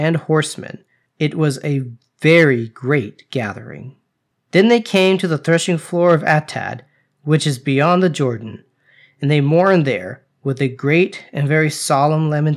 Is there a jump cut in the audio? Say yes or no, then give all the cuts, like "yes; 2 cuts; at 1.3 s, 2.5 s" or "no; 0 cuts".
no; 0 cuts